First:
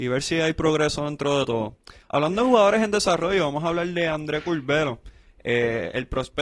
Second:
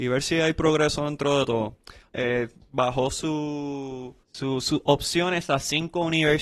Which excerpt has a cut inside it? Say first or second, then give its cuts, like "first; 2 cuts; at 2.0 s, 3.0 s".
second; 2 cuts; at 2.1 s, 4.2 s